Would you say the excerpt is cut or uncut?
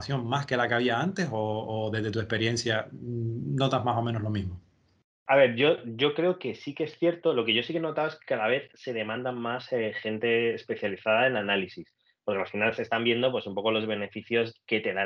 uncut